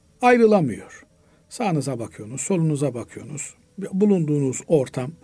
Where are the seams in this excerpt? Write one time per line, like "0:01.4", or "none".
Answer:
none